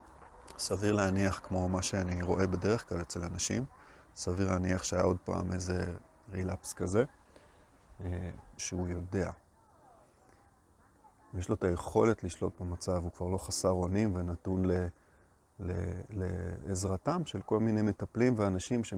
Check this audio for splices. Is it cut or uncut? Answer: cut